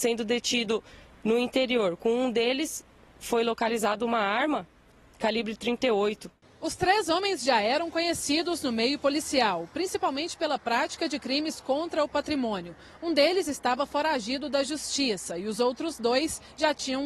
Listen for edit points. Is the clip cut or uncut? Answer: uncut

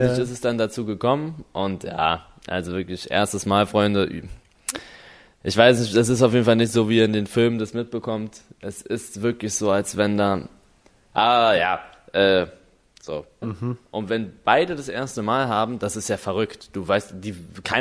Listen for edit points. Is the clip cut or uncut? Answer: cut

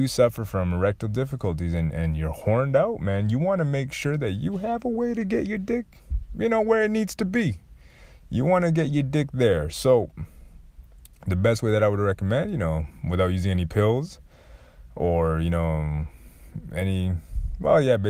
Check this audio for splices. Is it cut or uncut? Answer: uncut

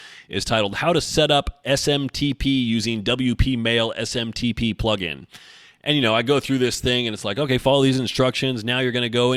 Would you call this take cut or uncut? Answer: uncut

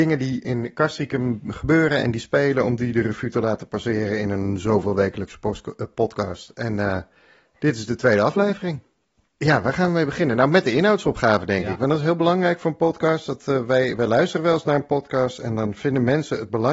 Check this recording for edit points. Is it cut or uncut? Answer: cut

